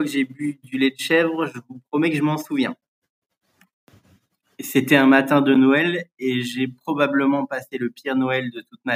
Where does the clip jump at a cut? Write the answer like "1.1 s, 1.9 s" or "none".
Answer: none